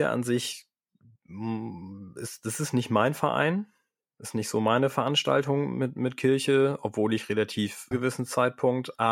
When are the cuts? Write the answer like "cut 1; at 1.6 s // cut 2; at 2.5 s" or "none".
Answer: cut 1; at 7.9 s